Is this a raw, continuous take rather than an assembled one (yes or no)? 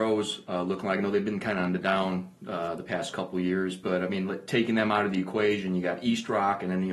yes